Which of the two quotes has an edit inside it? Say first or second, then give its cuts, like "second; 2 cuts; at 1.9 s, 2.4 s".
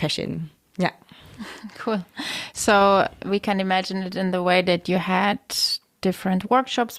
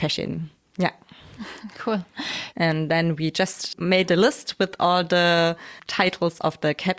second; 1 cut; at 2.5 s